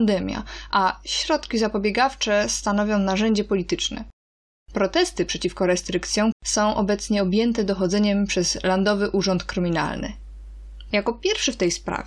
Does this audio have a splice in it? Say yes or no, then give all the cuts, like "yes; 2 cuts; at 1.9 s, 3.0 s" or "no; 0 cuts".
yes; 2 cuts; at 6.3 s, 10.9 s